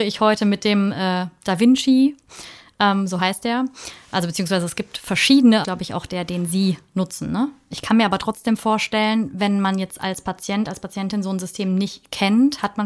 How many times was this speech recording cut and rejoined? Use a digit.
2